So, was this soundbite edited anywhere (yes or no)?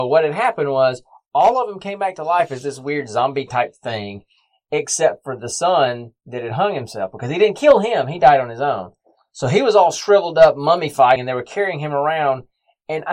yes